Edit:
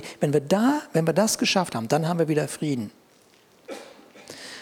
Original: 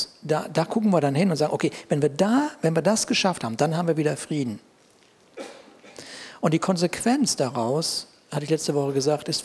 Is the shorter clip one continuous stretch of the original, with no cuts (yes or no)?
yes